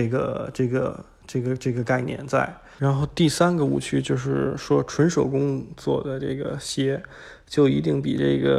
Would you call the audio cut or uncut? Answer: cut